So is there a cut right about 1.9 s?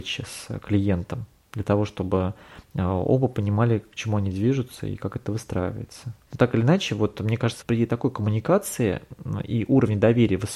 no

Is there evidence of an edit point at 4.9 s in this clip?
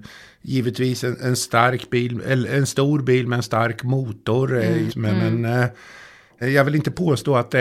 yes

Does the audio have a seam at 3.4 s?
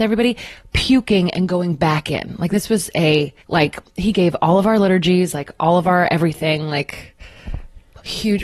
yes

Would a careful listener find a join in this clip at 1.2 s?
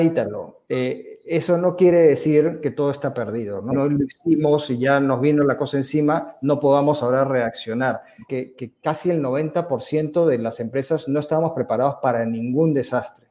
no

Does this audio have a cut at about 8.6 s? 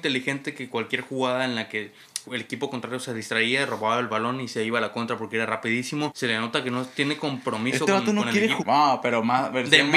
yes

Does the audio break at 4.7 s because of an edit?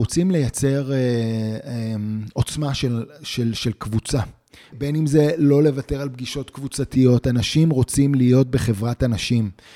yes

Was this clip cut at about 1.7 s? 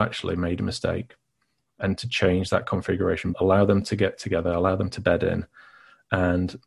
no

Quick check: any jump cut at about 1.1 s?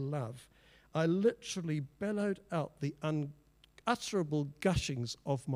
no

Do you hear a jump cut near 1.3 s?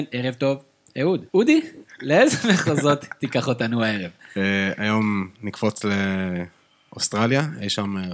yes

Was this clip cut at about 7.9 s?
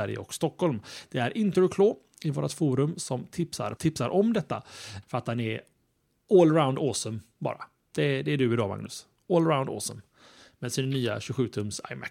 no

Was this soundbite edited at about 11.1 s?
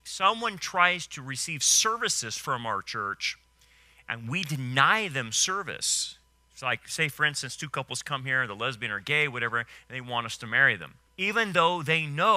yes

